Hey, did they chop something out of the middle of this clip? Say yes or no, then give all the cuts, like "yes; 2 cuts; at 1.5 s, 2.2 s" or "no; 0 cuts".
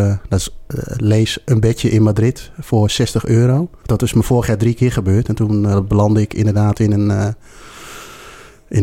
yes; 1 cut; at 3.8 s